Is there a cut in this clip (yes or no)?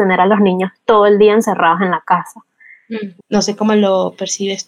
yes